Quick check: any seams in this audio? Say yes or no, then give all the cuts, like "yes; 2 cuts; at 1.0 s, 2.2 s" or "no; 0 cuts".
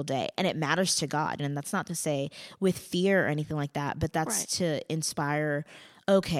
yes; 1 cut; at 1.4 s